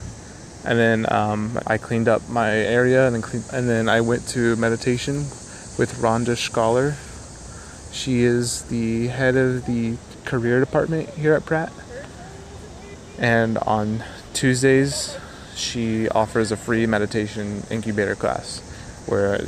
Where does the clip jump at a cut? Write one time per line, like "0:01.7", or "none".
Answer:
0:01.6
0:03.5